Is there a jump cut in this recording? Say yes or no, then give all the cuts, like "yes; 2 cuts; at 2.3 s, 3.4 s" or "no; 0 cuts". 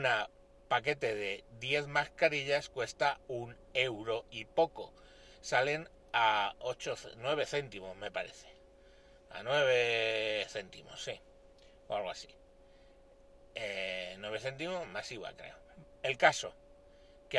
no; 0 cuts